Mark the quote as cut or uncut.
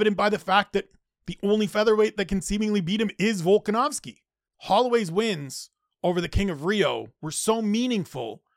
cut